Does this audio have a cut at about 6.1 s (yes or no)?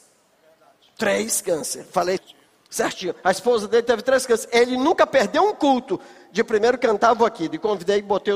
no